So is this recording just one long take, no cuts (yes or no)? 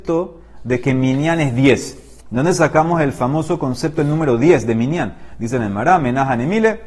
yes